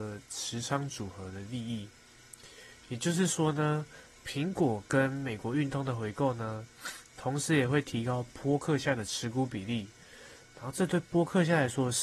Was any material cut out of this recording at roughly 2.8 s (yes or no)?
no